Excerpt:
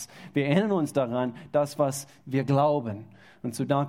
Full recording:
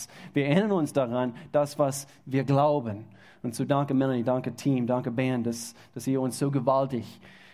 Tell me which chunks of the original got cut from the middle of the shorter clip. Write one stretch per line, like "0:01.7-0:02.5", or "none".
none